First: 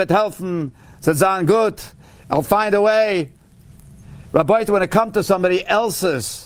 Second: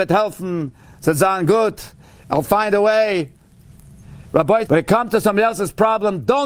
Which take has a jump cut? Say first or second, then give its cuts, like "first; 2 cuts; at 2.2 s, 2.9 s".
second; 1 cut; at 4.7 s